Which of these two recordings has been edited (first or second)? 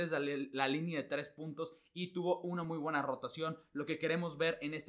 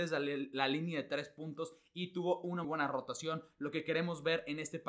second